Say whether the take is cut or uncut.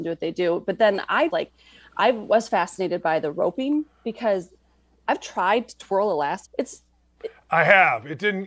cut